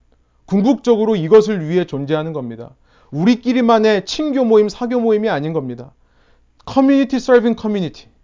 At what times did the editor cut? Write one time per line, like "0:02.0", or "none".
none